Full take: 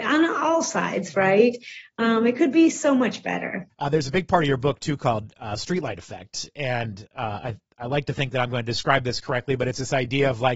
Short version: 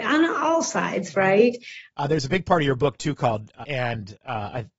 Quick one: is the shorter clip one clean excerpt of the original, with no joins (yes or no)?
no